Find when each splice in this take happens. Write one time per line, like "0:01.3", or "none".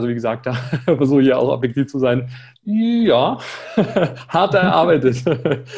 0:02.6